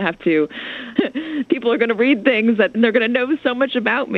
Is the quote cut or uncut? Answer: cut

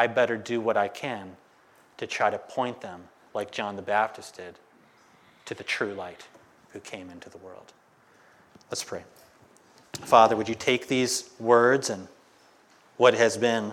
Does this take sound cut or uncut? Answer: uncut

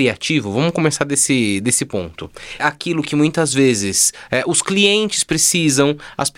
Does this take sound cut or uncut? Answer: cut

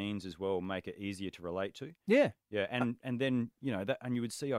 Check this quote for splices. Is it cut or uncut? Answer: uncut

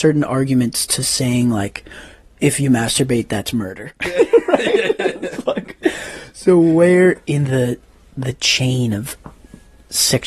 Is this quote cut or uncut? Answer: uncut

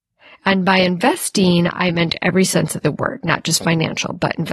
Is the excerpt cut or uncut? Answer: uncut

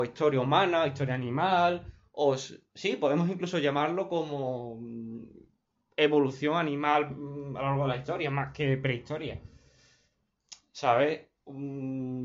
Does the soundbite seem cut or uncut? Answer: uncut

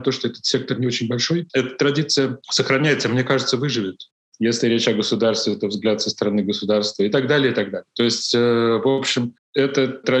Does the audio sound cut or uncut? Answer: cut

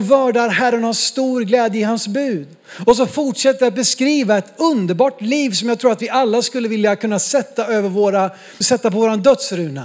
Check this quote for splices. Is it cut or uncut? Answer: cut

